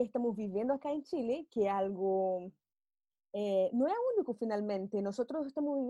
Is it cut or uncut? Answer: uncut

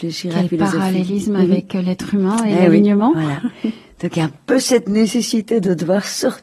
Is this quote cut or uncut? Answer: uncut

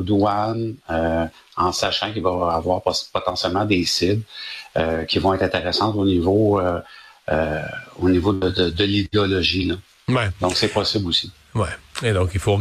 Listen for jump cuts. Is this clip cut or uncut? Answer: uncut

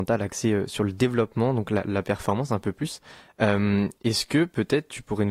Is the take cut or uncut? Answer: uncut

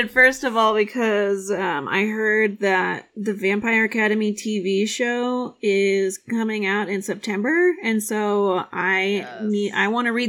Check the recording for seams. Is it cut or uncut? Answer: uncut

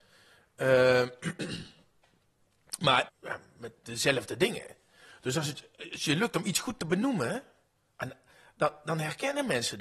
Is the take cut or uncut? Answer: cut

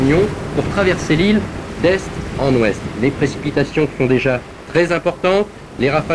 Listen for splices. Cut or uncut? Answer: uncut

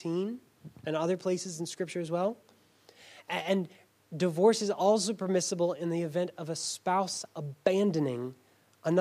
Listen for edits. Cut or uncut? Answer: uncut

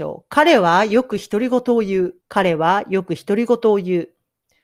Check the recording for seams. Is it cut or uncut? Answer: cut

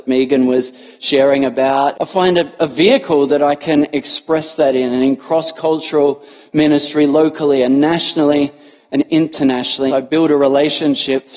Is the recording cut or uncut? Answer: cut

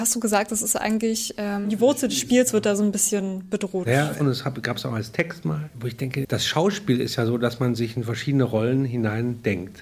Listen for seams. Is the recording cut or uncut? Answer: cut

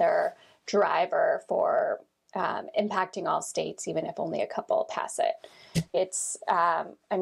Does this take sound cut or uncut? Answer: cut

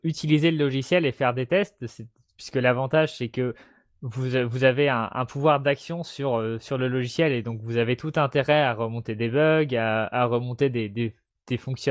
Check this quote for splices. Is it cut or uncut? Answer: uncut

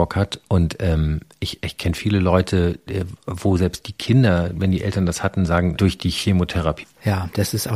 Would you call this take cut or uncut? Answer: cut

